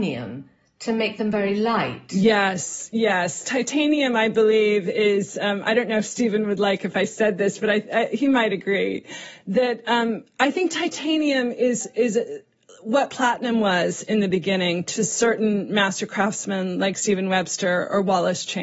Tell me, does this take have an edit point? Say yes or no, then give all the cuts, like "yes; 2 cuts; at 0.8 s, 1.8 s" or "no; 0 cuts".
no; 0 cuts